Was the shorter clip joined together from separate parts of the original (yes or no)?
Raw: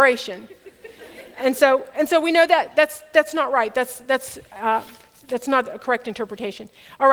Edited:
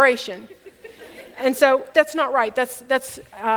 yes